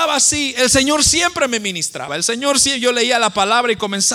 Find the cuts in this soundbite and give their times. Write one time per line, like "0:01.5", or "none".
0:02.1